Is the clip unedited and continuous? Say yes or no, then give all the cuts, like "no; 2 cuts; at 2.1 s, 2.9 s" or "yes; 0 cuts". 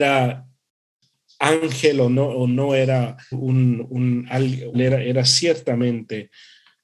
no; 2 cuts; at 3.3 s, 4.7 s